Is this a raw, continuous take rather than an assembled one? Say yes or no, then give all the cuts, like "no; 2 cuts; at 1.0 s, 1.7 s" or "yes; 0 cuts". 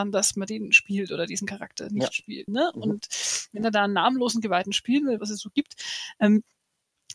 no; 2 cuts; at 2.5 s, 5.2 s